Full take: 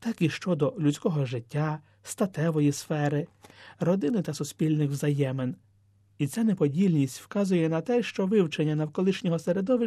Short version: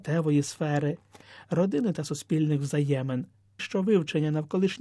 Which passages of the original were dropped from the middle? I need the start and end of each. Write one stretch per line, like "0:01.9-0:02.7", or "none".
0:05.9-0:08.0